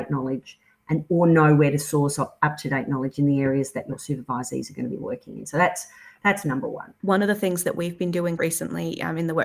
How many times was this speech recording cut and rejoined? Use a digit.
2